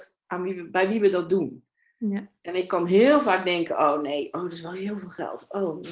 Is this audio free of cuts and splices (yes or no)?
yes